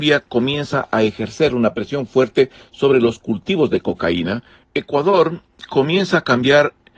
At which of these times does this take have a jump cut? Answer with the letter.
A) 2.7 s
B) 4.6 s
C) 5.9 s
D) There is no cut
B